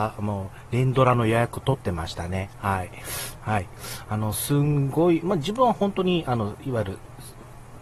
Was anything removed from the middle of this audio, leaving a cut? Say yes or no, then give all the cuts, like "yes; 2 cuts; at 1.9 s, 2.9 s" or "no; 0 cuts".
yes; 2 cuts; at 3.4 s, 5.2 s